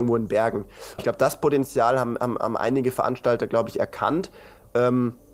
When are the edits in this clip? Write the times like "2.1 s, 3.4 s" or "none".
1.0 s